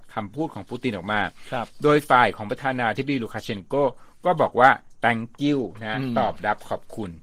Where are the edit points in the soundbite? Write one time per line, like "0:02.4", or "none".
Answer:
none